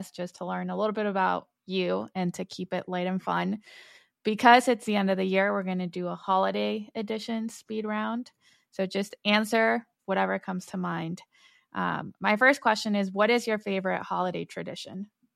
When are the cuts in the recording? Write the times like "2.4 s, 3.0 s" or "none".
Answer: none